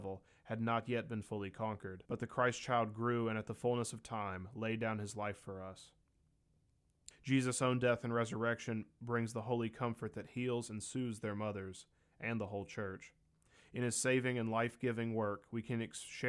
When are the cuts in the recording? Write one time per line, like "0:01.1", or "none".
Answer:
0:02.1
0:07.1